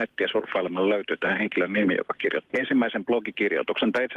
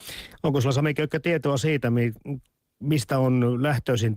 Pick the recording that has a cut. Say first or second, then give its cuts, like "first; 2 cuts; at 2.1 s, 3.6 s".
first; 1 cut; at 2.5 s